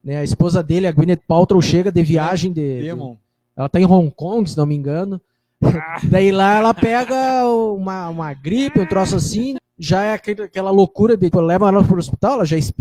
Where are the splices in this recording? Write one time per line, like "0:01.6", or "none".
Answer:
0:09.6
0:11.3